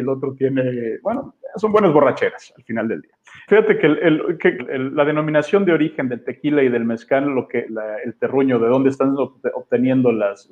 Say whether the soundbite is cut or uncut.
cut